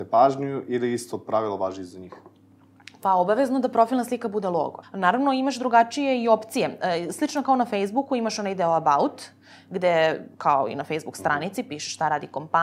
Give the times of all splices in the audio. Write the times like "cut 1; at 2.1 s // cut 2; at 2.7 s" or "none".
cut 1; at 4.8 s